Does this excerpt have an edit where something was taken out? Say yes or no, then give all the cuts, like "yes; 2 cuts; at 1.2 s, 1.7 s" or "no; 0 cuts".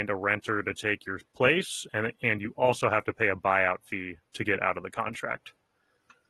no; 0 cuts